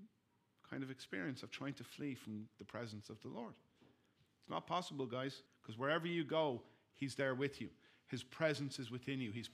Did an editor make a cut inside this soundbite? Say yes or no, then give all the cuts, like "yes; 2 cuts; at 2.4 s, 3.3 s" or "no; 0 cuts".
yes; 1 cut; at 5.5 s